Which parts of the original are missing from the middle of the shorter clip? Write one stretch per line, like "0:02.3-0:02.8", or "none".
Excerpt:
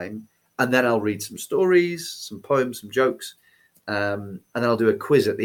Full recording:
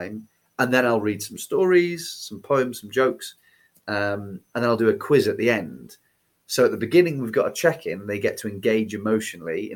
none